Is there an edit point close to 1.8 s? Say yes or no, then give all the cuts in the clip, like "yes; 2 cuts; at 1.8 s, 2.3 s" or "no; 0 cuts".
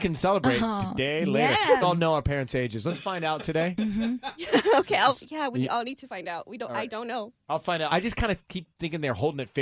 yes; 2 cuts; at 1.8 s, 7.9 s